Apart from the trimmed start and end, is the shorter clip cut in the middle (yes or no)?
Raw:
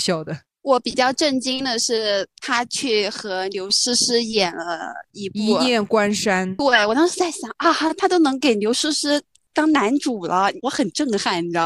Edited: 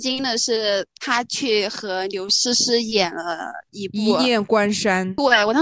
no